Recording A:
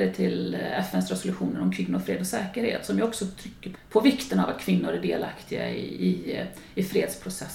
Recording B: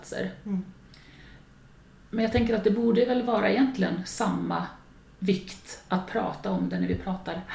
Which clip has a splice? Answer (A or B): A